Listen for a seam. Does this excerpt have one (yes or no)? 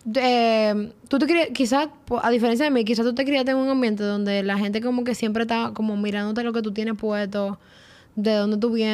no